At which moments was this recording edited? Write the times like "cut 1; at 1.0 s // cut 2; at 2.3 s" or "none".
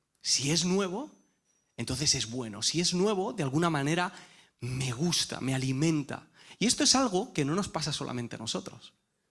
none